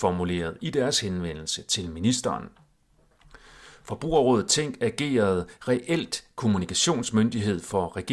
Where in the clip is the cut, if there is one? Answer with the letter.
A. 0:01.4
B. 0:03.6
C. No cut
C